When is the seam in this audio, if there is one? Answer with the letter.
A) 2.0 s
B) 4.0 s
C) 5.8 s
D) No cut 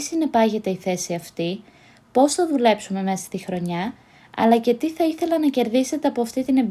D